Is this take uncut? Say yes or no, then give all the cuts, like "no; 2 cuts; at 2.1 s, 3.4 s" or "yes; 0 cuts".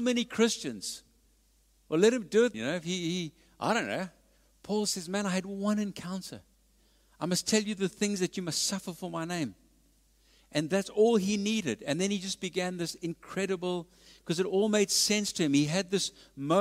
no; 1 cut; at 2.5 s